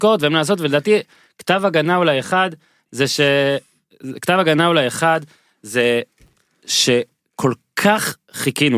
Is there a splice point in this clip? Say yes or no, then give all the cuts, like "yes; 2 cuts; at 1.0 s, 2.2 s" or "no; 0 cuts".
no; 0 cuts